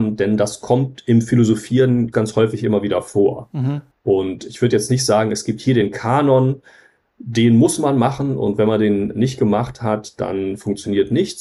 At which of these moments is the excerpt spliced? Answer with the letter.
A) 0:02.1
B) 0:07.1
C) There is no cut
A